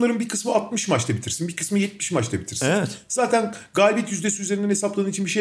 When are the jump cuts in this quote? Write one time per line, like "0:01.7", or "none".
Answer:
none